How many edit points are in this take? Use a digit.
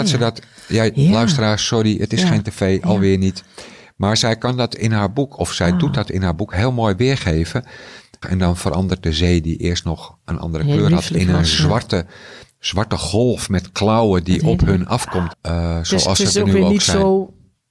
2